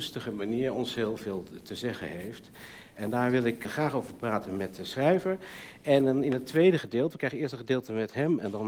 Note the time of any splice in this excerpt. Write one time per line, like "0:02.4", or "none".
0:03.6